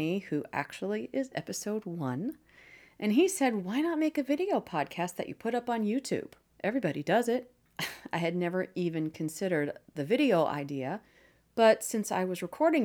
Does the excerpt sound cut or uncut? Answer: uncut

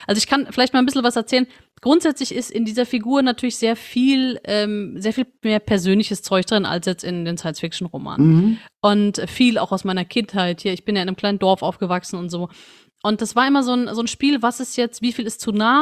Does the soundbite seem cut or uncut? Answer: uncut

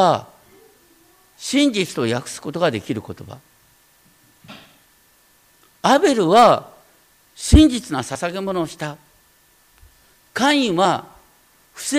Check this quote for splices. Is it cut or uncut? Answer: uncut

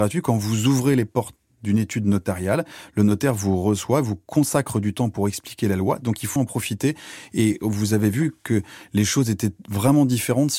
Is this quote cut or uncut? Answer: cut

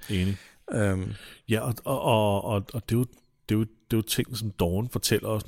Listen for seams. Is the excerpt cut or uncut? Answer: uncut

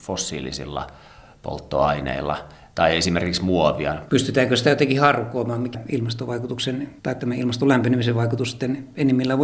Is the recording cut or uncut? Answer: cut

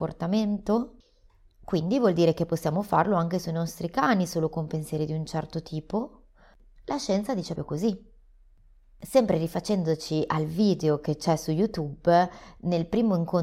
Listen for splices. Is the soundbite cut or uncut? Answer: cut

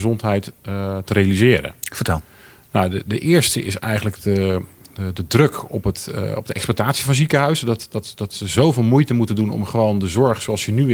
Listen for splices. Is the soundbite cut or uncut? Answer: uncut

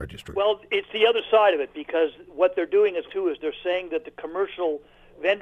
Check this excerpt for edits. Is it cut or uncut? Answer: cut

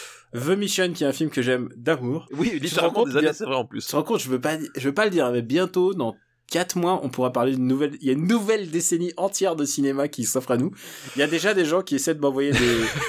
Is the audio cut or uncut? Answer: cut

